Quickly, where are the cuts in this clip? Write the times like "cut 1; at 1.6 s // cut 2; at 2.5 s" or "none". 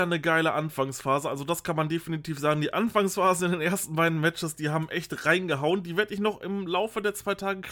none